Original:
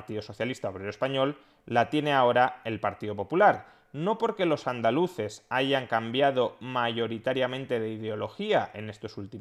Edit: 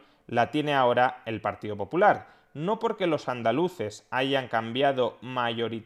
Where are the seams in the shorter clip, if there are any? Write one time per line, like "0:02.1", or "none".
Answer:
none